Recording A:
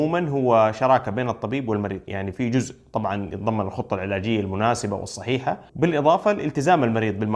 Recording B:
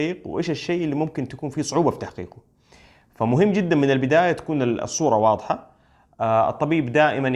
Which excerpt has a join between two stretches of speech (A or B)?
A